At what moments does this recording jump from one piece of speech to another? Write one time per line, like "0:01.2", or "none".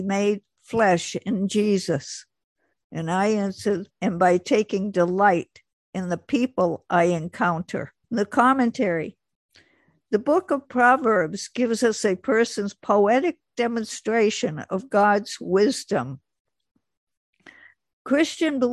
0:02.7
0:03.9
0:08.0